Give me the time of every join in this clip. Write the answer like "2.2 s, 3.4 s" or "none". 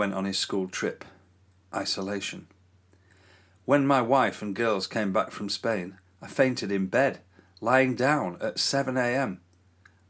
none